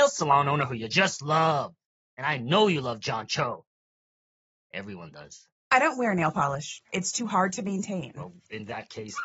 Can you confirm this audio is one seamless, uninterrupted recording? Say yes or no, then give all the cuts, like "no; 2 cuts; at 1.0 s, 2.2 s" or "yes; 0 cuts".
no; 1 cut; at 5.6 s